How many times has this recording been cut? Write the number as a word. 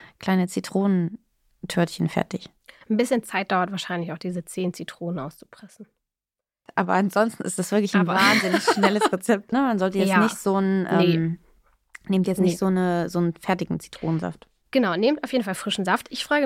one